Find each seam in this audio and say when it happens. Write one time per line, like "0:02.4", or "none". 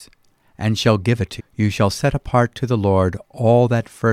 0:01.4